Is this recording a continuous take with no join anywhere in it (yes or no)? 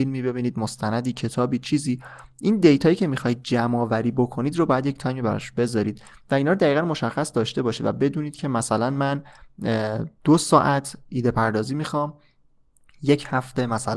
no